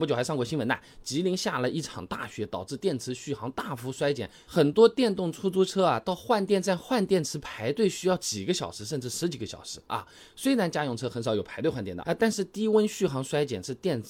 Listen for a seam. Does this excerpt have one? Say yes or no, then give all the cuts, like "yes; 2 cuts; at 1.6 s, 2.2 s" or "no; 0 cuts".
yes; 1 cut; at 12.0 s